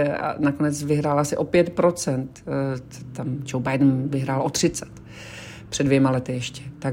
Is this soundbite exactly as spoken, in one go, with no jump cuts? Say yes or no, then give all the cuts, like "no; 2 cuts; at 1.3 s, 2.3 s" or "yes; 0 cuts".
yes; 0 cuts